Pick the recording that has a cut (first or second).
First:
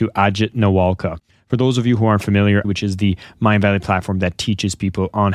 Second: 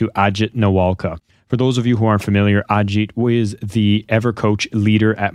first